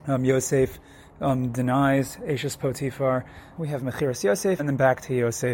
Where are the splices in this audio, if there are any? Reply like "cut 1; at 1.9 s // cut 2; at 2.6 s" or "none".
cut 1; at 3.6 s // cut 2; at 4.6 s